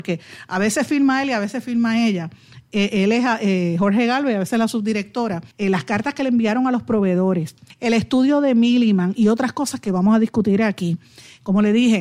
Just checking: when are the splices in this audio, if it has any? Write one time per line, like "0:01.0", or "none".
0:05.5
0:07.7